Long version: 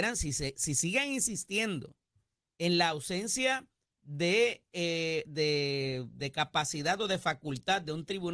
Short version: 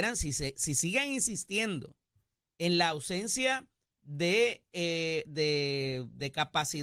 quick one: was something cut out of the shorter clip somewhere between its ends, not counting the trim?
no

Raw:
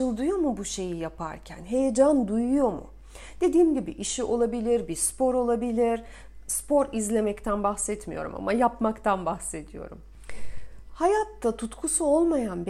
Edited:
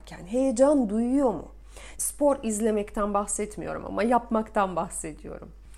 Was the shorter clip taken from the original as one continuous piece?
no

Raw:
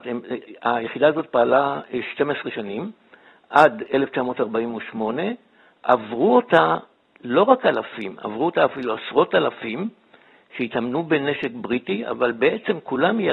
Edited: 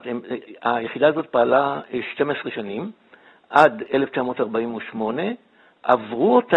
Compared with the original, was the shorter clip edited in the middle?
no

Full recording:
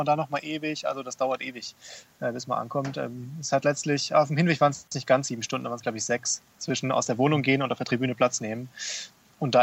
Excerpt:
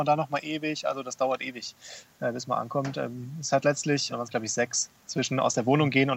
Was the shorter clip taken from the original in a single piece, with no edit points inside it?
no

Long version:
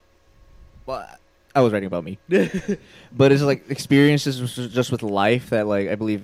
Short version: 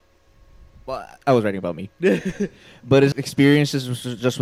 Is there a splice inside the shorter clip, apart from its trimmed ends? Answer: yes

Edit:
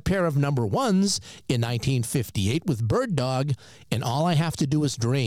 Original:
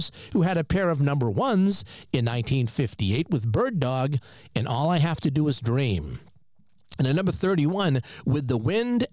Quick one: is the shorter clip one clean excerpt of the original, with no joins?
yes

